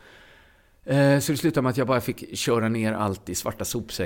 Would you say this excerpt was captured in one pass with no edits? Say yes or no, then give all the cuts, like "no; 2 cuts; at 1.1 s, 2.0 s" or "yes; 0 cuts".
yes; 0 cuts